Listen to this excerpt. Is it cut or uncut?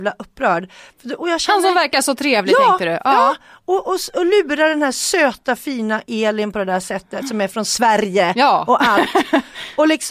uncut